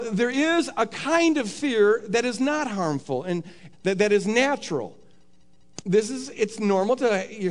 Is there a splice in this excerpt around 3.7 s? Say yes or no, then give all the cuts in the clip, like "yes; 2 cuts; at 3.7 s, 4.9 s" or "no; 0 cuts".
yes; 2 cuts; at 3.7 s, 5.8 s